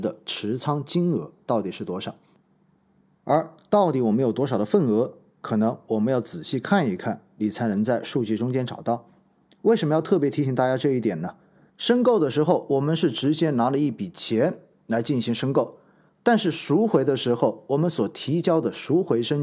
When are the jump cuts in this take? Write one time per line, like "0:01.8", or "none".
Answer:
0:11.7